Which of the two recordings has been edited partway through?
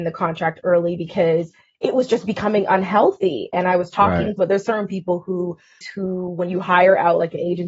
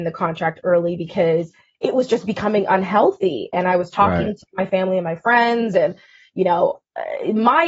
first; 2 cuts; at 4.4 s, 5.8 s

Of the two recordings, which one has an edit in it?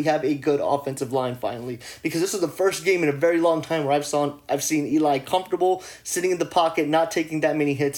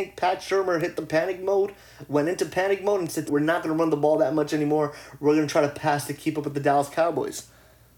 second; 1 cut; at 3.3 s

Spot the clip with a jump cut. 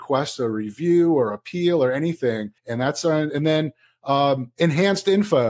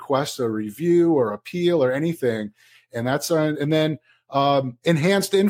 first; 1 cut; at 2.6 s

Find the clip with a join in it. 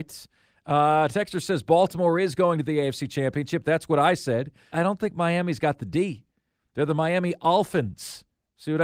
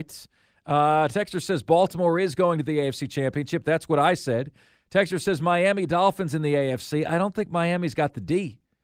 first; 2 cuts; at 4.7 s, 6.6 s

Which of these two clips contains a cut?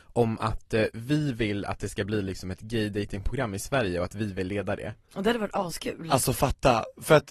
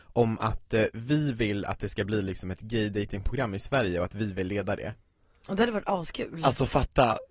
first; 1 cut; at 5.0 s

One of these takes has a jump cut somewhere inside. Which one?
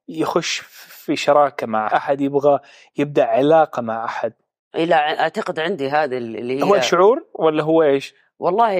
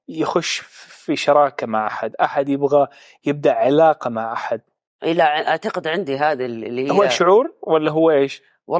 first; 1 cut; at 1.9 s

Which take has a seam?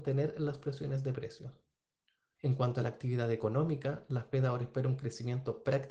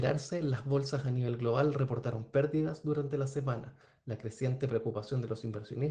first; 1 cut; at 2.3 s

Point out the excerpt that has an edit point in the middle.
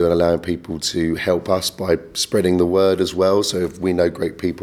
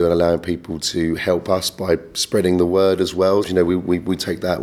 second; 1 cut; at 3.4 s

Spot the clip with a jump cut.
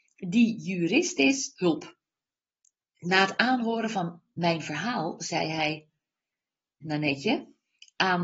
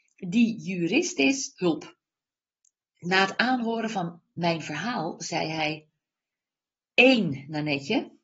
first; 1 cut; at 6.8 s

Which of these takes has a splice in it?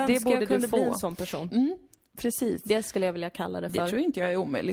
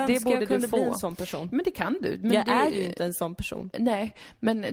first; 1 cut; at 1.5 s

